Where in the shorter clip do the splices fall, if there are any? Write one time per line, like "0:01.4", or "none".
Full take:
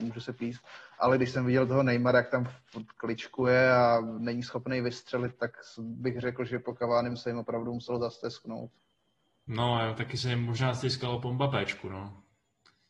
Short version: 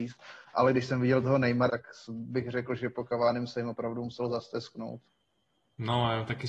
0:01.7

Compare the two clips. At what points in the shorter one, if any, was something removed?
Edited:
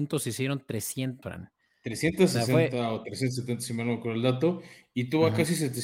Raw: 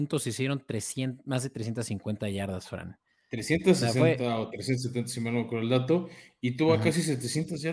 0:01.2

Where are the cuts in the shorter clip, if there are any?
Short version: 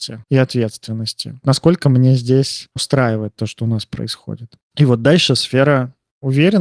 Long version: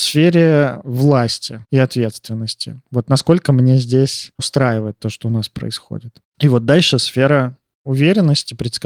0:01.4

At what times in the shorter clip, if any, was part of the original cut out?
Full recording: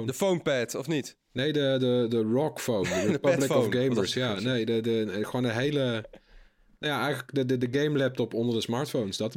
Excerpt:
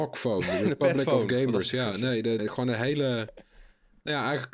0:02.4

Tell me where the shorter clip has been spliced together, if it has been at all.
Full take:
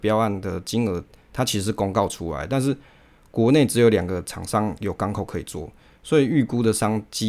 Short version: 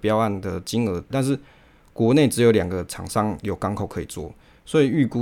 0:01.1

